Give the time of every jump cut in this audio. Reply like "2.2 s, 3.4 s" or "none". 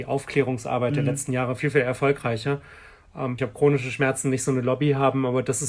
3.4 s